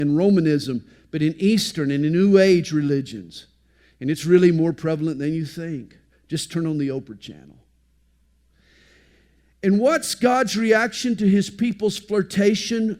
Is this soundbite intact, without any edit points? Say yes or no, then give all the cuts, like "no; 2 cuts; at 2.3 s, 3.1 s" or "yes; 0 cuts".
yes; 0 cuts